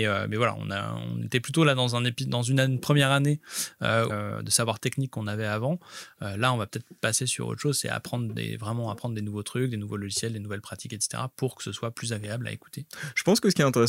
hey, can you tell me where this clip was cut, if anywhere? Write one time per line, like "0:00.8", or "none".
0:04.1